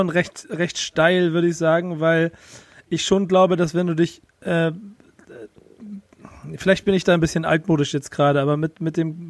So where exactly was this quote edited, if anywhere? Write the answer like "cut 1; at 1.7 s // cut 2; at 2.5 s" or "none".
none